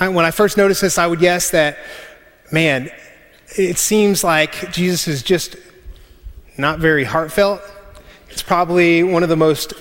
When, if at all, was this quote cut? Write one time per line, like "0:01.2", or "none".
none